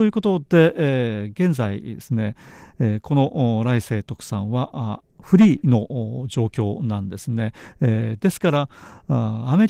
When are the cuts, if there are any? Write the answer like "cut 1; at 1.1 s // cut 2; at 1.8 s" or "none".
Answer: none